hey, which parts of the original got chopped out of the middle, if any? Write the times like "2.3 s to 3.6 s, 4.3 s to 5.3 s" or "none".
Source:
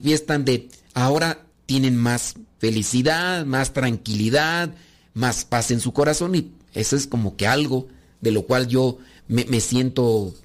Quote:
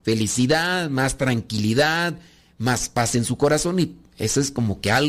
none